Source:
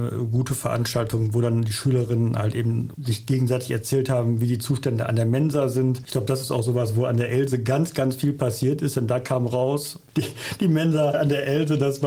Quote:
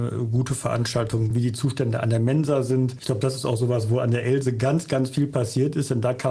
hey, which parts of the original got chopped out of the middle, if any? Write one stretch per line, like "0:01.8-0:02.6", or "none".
0:01.3-0:04.4

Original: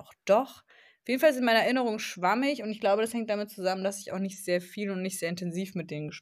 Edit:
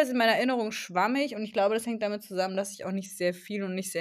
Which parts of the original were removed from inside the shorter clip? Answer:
none

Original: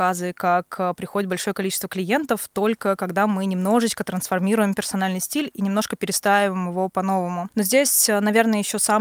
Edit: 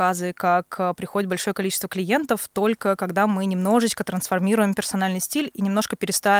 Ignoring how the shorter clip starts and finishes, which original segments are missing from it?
none

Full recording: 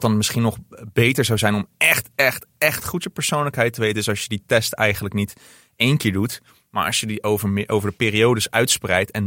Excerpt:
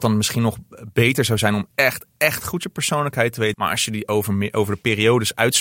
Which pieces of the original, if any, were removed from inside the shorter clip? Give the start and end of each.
0:01.7-0:02.1
0:03.9-0:06.7

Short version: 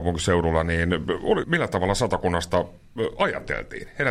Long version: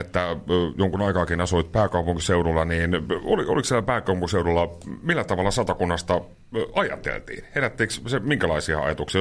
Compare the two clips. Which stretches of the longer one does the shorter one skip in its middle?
0:03.4-0:05.0

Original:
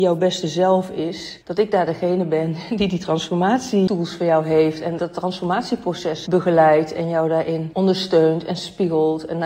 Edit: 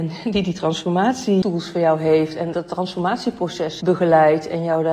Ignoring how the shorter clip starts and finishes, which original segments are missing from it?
none

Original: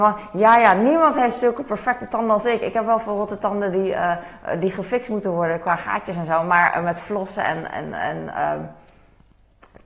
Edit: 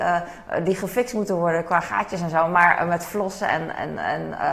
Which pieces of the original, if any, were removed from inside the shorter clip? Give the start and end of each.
none

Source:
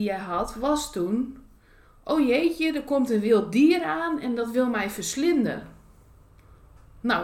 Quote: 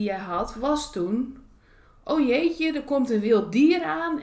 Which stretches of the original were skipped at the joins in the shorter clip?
none

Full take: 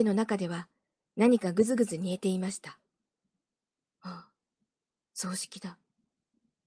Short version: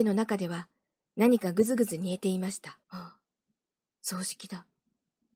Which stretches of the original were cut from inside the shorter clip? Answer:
0:02.8-0:04.0

